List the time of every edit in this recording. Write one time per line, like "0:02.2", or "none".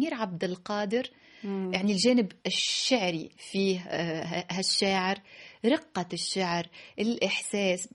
none